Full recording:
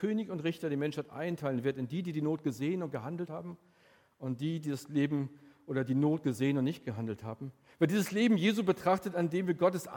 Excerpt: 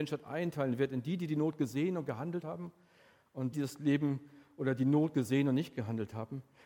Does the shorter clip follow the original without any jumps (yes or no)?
no